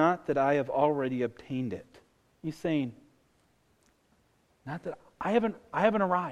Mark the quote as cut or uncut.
uncut